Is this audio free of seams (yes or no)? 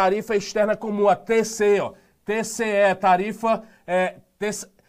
yes